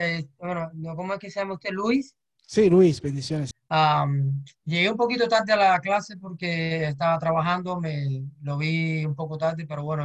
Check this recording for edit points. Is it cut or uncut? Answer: cut